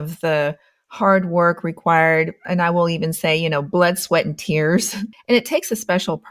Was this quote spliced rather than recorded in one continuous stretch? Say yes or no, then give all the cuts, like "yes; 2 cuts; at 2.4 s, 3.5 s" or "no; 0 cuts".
no; 0 cuts